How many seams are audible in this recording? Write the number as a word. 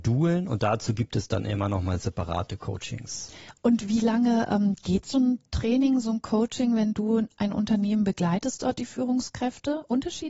zero